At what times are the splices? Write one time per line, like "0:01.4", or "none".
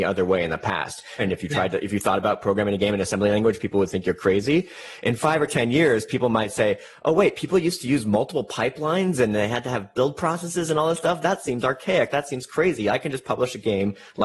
0:01.2